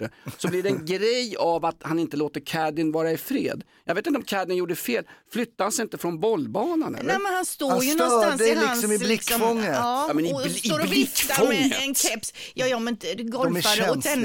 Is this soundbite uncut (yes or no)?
yes